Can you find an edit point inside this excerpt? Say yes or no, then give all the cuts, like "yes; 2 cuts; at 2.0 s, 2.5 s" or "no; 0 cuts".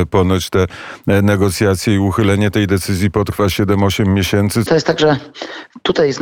yes; 1 cut; at 4.7 s